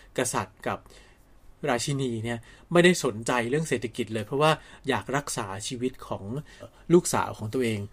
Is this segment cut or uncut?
cut